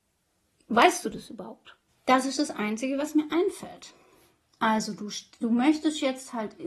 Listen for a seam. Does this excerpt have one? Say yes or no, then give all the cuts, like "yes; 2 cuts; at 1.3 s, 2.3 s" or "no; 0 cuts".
yes; 1 cut; at 1.9 s